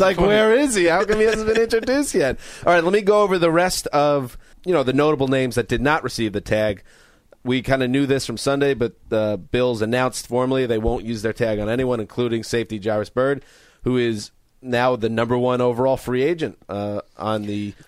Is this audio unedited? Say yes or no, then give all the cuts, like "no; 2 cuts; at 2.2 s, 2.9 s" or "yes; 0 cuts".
no; 1 cut; at 4.5 s